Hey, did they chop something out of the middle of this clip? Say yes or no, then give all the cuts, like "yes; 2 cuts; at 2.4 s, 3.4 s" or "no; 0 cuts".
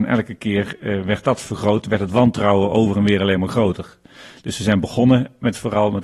no; 0 cuts